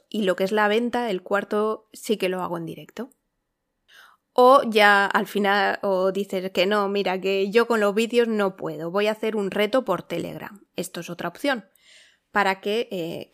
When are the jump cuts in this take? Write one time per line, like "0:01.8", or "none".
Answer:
none